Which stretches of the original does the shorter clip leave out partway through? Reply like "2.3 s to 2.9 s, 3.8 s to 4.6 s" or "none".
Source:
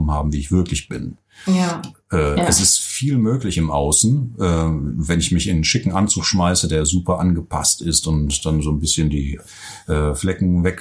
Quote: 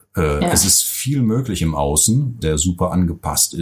4.4 s to 6.7 s